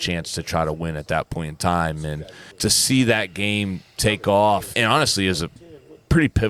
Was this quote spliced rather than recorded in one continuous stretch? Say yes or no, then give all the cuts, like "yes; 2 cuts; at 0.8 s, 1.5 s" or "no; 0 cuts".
yes; 2 cuts; at 2.5 s, 4.7 s